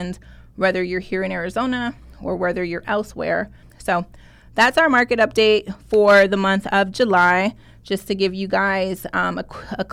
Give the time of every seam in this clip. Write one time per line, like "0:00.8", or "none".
0:03.6